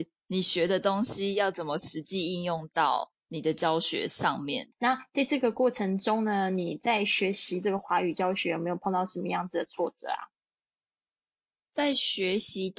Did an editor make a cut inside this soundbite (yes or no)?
yes